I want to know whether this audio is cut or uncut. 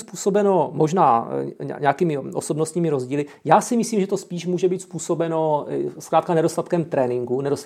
uncut